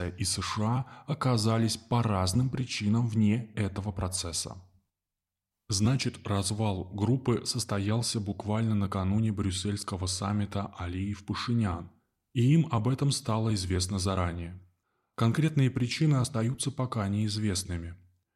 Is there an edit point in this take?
yes; 1 cut; at 5.5 s

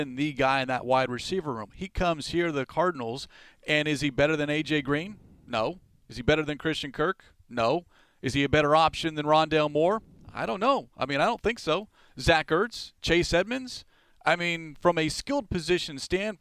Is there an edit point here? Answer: no; 0 cuts

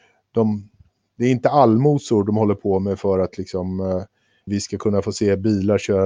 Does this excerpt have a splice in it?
yes; 1 cut; at 4.5 s

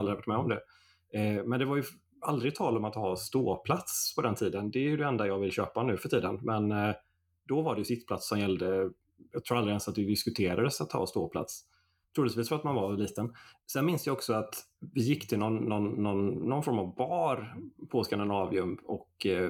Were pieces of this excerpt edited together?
no; 0 cuts

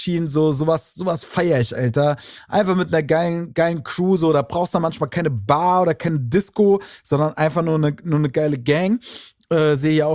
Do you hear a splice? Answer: yes; 1 cut; at 1.8 s

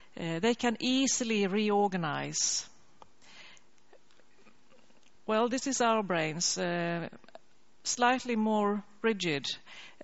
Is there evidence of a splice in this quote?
no; 0 cuts

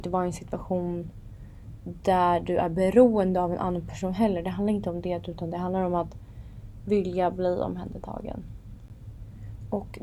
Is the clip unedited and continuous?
yes; 0 cuts

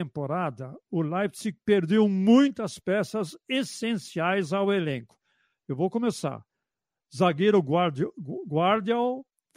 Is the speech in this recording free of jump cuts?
yes; 0 cuts

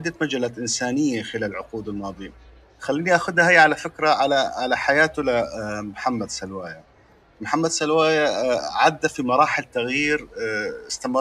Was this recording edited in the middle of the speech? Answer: no; 0 cuts

